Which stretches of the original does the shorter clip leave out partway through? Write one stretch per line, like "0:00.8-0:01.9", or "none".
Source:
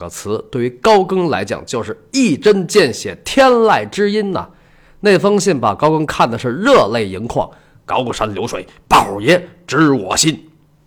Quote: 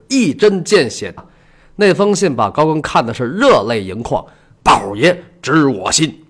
0:03.2-0:04.4
0:07.8-0:08.8